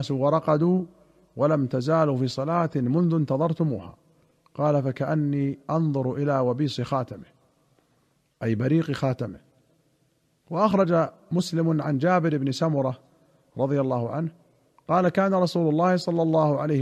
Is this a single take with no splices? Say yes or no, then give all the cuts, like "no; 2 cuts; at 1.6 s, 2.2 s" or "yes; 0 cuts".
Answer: yes; 0 cuts